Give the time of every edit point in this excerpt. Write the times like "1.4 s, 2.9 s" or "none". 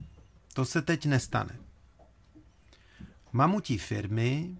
3.2 s